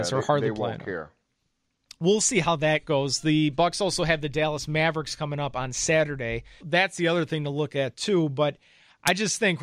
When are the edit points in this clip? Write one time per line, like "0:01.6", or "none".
0:06.6